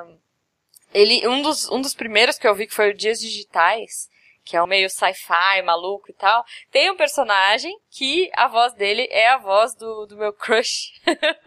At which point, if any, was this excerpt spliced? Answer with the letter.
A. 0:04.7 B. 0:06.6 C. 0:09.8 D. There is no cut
A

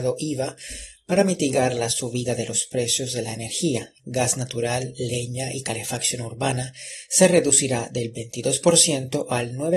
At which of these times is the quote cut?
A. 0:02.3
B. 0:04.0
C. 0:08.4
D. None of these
B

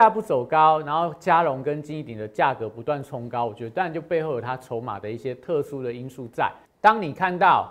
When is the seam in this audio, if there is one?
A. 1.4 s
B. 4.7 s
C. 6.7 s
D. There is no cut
C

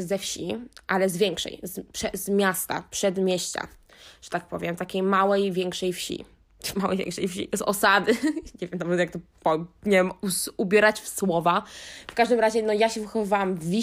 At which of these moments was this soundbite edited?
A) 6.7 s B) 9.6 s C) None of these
C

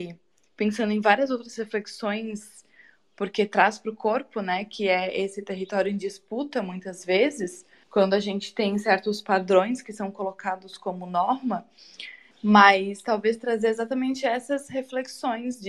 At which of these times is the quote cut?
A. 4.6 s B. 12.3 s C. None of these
B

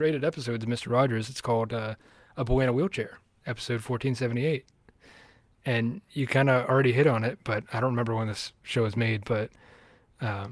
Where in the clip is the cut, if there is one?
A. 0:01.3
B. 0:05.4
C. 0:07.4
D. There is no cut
D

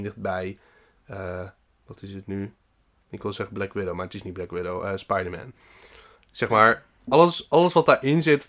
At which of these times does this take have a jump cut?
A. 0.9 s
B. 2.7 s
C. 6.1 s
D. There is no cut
D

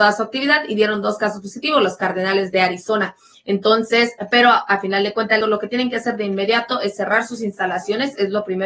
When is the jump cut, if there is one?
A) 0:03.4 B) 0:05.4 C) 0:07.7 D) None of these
B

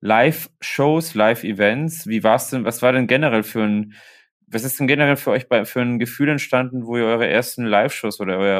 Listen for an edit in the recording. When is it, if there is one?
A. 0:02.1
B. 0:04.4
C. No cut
C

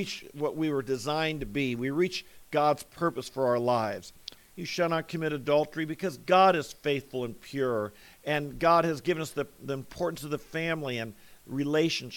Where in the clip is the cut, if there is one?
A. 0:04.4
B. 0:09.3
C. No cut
A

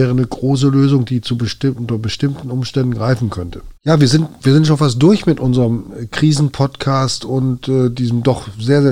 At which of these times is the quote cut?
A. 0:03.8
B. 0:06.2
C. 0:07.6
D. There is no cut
A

